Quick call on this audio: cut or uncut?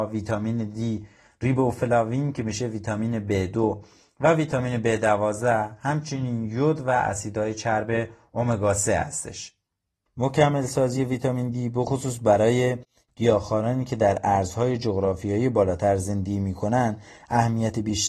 cut